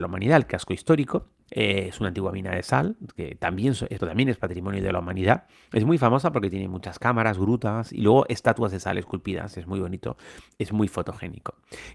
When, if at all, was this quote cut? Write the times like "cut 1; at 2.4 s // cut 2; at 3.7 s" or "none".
cut 1; at 1.5 s // cut 2; at 4.0 s